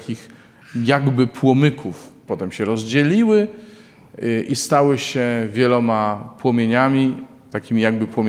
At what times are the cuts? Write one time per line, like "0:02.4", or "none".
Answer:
0:02.3